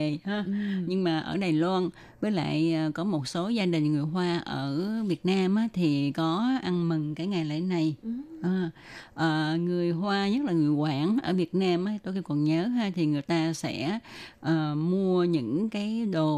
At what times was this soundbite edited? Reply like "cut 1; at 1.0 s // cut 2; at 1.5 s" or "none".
none

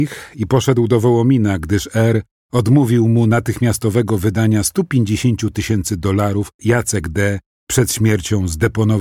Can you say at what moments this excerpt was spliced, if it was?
cut 1; at 6.6 s

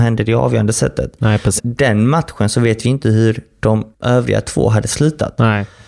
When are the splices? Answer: cut 1; at 1.6 s // cut 2; at 3.9 s

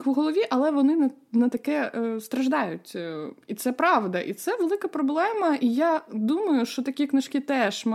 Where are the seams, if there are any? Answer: none

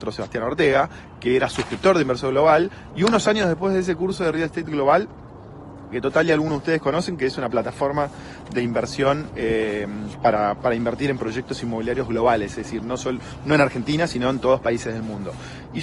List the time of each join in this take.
cut 1; at 2.9 s // cut 2; at 5.9 s

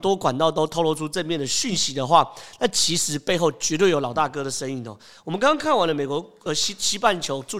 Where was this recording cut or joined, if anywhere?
none

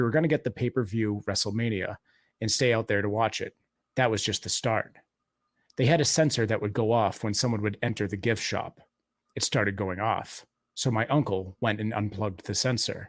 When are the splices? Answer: cut 1; at 3.8 s

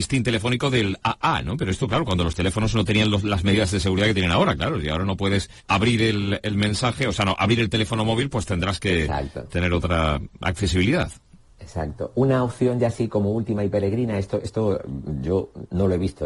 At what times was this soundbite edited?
cut 1; at 5.6 s

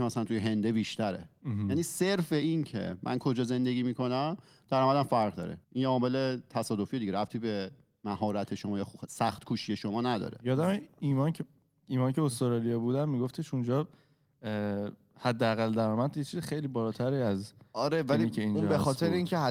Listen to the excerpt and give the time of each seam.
cut 1; at 5.6 s

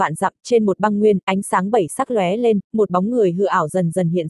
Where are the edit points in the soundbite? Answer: none

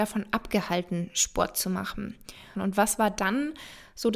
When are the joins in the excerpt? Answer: cut 1; at 2.5 s

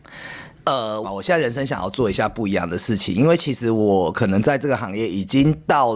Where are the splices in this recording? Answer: cut 1; at 1.0 s

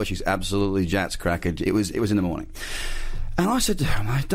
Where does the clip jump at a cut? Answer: none

